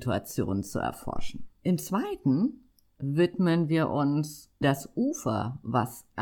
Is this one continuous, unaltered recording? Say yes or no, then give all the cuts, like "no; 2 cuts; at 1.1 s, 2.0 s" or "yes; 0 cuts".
no; 2 cuts; at 1.5 s, 4.6 s